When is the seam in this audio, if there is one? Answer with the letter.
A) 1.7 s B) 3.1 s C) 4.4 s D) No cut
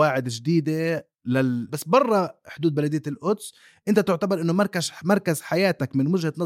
A